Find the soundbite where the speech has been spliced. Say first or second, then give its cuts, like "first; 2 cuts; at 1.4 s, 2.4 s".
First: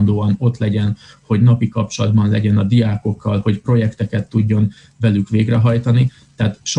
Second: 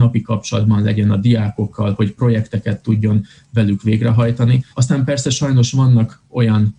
second; 1 cut; at 4.7 s